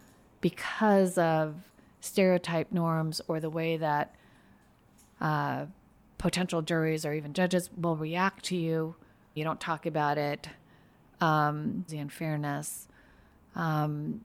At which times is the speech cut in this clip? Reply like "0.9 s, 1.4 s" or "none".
9.4 s, 11.9 s